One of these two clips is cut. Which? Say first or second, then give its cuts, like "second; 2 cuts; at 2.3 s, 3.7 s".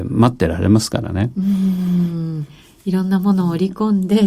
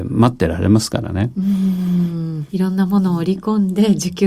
second; 1 cut; at 2.5 s